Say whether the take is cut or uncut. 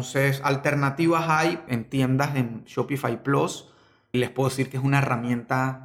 cut